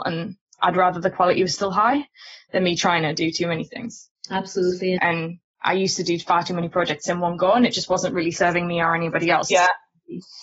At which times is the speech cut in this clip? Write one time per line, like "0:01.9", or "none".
0:05.0
0:09.5